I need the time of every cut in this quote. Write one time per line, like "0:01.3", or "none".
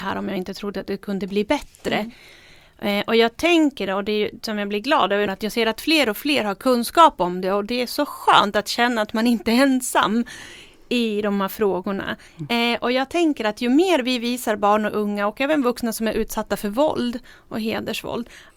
0:05.3
0:12.3